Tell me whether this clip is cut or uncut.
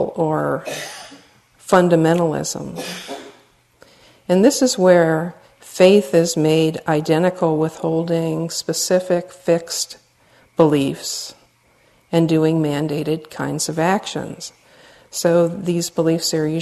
uncut